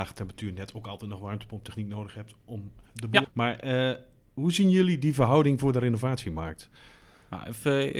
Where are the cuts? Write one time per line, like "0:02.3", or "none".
0:03.2